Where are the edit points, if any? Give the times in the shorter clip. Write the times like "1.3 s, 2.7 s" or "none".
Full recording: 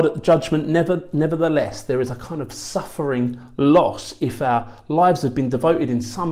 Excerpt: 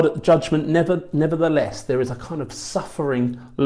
none